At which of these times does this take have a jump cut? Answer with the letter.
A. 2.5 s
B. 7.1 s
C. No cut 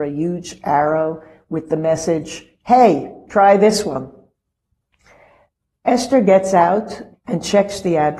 B